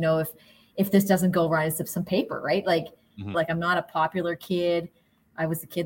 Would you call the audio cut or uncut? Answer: cut